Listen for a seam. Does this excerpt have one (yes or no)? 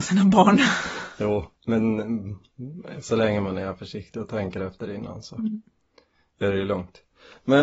yes